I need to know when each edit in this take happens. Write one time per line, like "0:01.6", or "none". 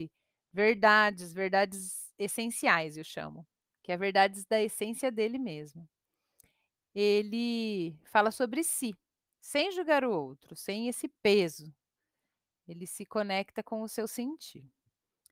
none